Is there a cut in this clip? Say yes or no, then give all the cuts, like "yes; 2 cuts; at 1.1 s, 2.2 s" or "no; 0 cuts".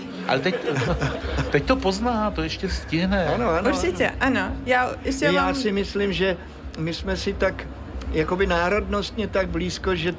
no; 0 cuts